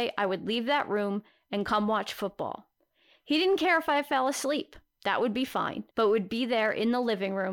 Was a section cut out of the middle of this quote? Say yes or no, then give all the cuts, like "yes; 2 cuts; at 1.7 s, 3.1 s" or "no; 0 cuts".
yes; 1 cut; at 5.9 s